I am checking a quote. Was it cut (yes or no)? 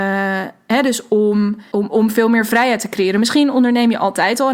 yes